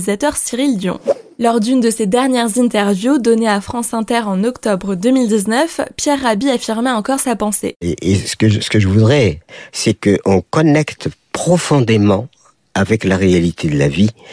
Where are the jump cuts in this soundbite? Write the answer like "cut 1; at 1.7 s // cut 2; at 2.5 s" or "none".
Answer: none